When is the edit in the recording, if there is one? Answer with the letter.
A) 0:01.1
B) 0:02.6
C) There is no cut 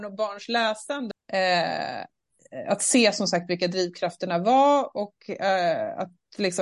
A